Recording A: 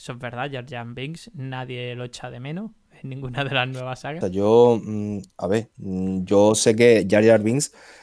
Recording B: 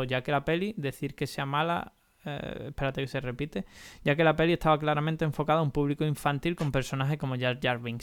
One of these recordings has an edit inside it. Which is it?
A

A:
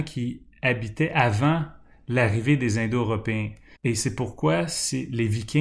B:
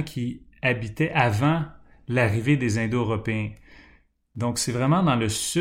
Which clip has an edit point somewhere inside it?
A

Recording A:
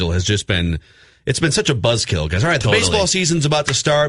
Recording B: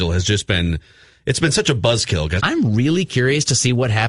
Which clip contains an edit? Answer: B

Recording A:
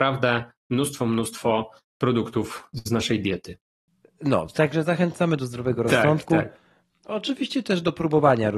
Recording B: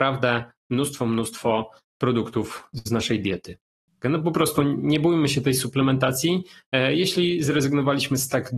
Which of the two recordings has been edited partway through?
B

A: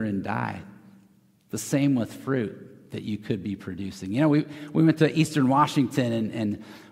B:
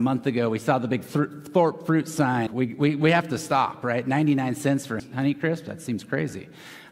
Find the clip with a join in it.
B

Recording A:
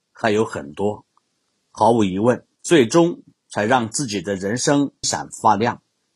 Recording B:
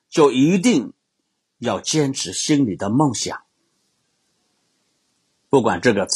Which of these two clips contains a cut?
A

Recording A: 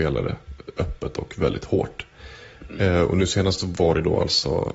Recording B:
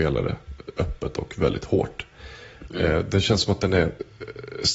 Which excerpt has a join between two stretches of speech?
B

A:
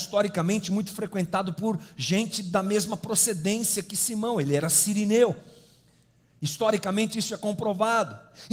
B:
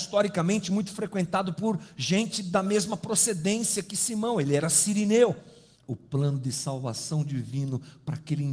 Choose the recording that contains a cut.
B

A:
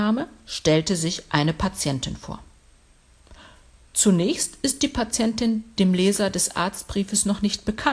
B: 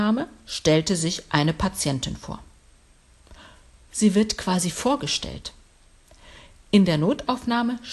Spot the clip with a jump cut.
B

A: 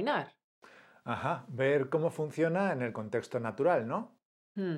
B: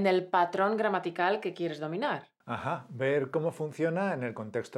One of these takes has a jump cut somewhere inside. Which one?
B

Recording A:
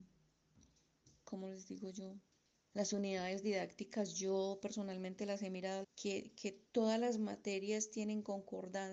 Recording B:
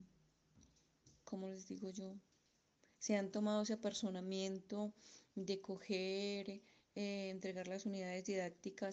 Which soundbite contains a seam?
A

